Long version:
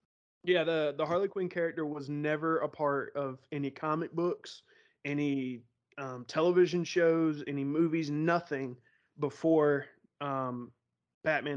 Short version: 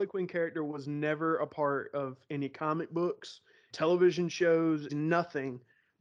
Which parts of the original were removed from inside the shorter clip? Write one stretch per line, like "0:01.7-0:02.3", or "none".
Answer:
0:04.9-0:06.3
0:07.4-0:08.1